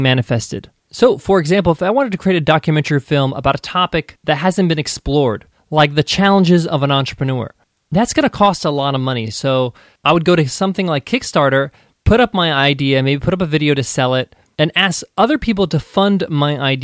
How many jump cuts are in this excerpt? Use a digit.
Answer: 0